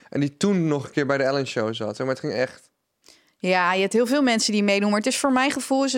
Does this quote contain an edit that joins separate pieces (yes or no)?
no